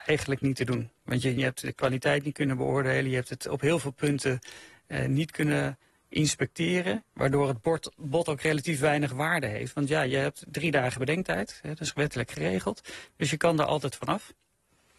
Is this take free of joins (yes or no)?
no